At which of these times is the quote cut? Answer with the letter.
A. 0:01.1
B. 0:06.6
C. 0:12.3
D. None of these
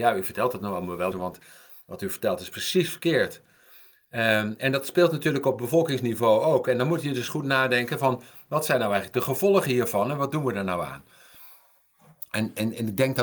A